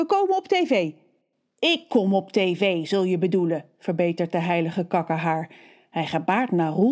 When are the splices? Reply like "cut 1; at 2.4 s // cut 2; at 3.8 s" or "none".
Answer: none

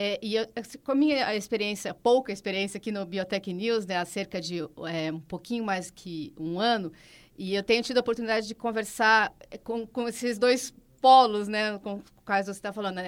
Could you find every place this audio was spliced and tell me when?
none

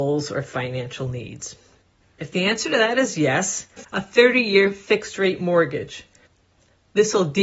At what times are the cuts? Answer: cut 1; at 2.0 s // cut 2; at 3.8 s

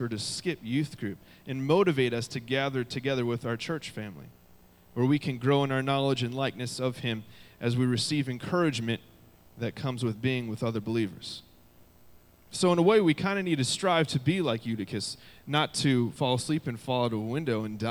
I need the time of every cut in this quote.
none

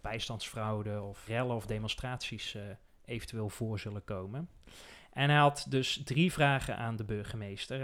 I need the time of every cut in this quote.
cut 1; at 1.3 s

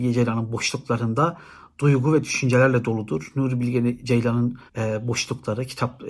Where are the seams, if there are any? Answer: cut 1; at 4.7 s

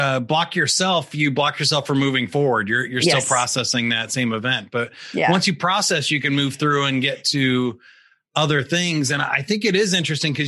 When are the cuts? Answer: none

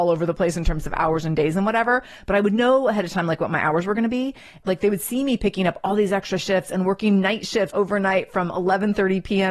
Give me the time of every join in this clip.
cut 1; at 4.6 s // cut 2; at 7.7 s

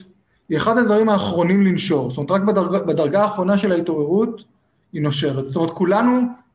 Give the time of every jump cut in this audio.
none

